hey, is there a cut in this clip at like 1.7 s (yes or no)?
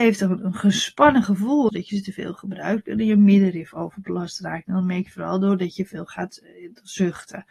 yes